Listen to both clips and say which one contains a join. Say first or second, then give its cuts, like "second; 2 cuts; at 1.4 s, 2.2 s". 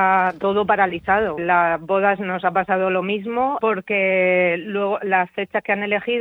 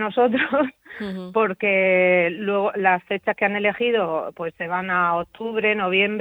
first; 2 cuts; at 1.4 s, 3.6 s